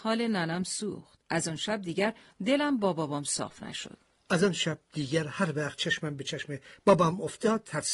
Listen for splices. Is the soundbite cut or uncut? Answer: cut